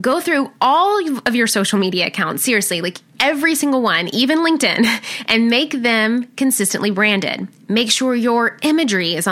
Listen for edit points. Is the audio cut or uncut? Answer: uncut